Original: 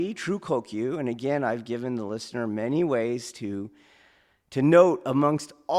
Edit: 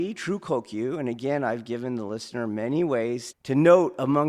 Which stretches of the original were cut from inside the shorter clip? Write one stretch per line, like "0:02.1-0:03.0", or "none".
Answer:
0:03.3-0:04.4